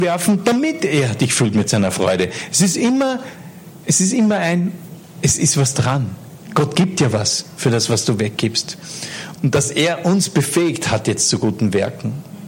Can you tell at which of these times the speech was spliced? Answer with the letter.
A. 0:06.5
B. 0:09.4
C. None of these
B